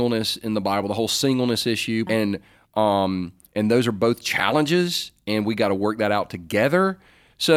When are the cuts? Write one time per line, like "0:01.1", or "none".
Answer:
0:02.1